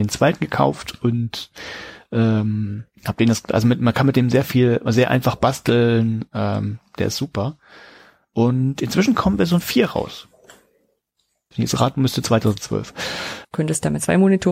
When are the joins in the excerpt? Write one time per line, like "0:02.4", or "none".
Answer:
0:11.5
0:13.4